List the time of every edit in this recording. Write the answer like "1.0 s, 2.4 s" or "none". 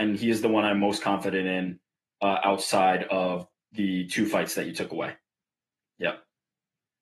none